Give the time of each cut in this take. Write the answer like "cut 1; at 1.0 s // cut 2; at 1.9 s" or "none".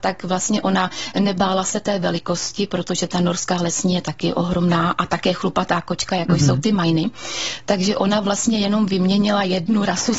none